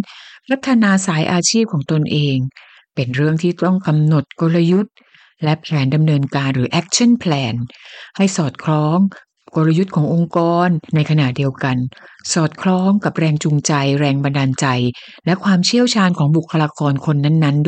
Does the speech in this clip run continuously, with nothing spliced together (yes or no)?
no